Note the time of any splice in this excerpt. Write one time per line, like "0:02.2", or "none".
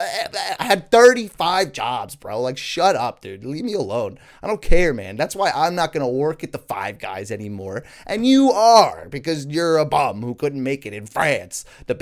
none